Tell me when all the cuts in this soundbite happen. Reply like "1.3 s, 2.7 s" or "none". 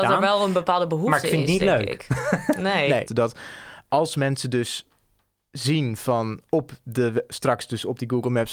3.1 s